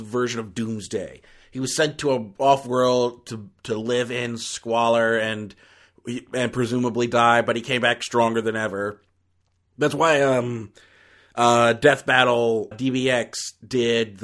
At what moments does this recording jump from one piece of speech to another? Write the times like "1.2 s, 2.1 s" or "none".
12.7 s